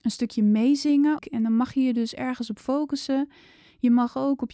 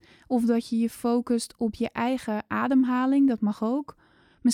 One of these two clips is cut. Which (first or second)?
first